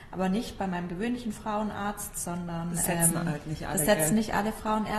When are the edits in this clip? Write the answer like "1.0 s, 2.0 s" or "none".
none

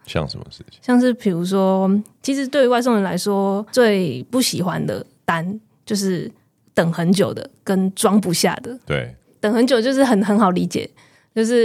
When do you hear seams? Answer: none

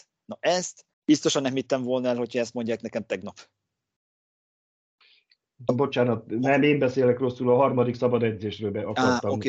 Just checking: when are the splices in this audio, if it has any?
0.9 s, 5.7 s

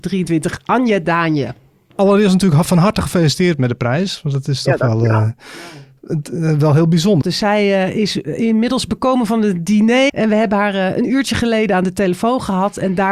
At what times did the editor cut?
7.2 s, 10.1 s

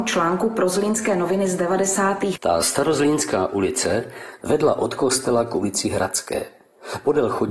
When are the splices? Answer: 2.4 s, 4.4 s

